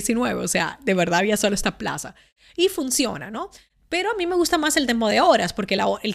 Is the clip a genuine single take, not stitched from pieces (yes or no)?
yes